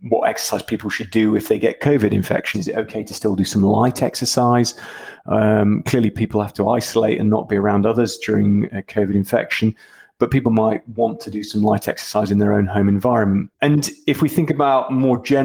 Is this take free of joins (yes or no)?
no